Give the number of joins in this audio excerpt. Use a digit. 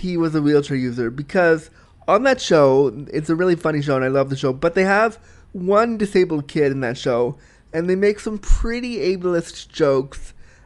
0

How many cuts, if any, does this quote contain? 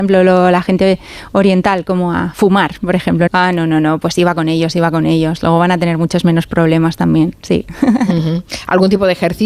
1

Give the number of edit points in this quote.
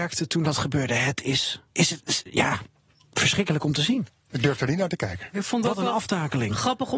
2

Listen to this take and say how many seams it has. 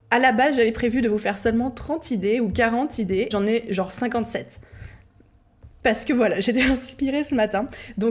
1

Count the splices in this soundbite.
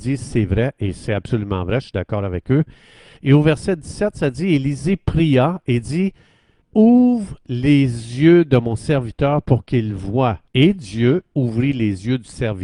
3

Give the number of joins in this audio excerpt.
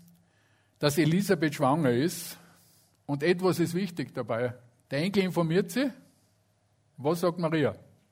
1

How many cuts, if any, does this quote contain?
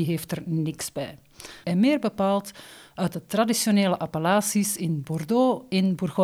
1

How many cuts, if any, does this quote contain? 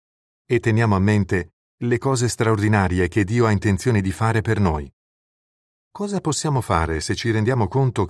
1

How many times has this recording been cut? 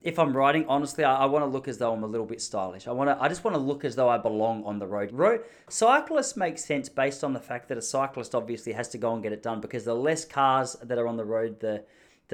1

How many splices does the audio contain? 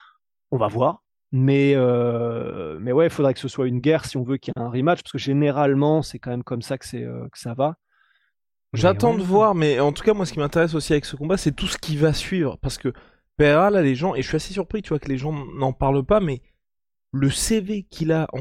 0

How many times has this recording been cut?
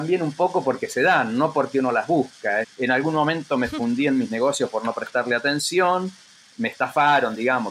1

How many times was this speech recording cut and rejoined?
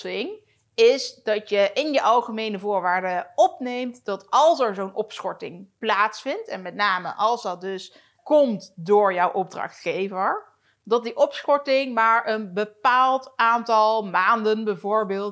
1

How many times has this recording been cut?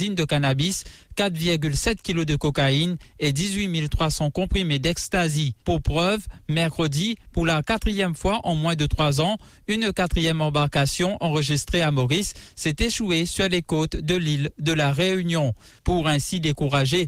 2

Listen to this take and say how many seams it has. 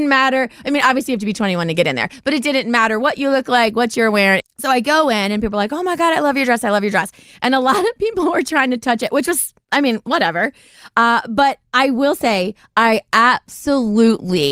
1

